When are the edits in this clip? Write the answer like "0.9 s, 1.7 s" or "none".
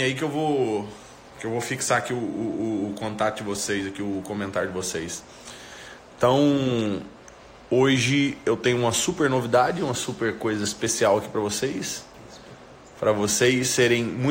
none